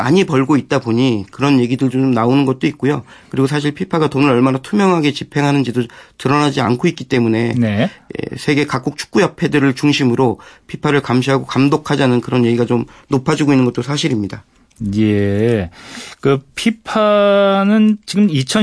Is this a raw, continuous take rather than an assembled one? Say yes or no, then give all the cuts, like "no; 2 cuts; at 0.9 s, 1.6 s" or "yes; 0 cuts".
yes; 0 cuts